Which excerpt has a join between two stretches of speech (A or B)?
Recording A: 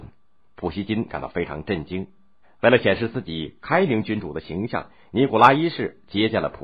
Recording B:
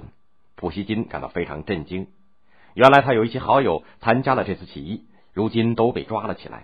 A